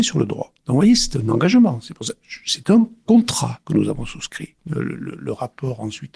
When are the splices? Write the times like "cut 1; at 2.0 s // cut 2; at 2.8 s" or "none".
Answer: cut 1; at 4.6 s